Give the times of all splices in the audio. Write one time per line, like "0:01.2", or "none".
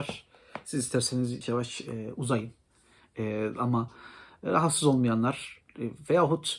0:01.4